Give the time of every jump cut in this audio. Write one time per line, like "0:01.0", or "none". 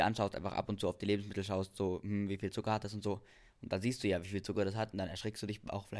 none